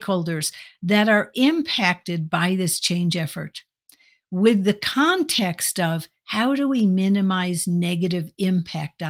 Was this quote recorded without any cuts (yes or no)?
yes